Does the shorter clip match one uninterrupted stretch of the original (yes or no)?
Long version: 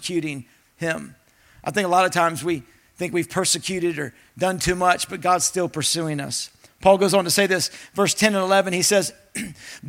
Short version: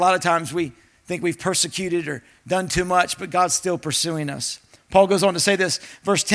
yes